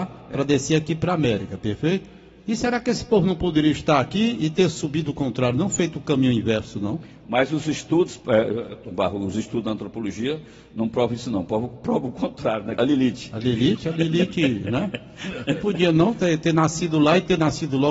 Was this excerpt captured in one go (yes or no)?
no